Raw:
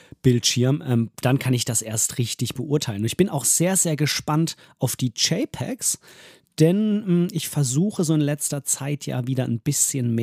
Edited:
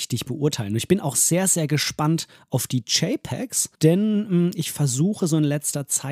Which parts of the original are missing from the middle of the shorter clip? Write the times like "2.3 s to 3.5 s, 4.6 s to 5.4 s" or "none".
6.0 s to 6.5 s